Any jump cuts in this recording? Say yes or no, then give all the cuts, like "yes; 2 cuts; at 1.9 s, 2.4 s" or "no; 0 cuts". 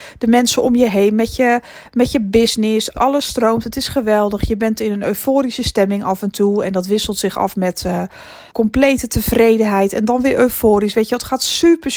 yes; 2 cuts; at 2.9 s, 8.5 s